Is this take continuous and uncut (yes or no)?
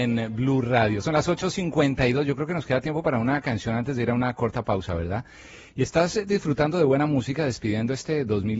yes